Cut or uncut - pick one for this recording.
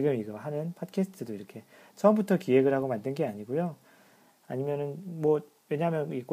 cut